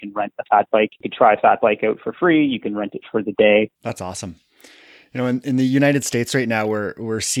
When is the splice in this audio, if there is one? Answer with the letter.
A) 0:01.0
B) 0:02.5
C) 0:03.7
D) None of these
C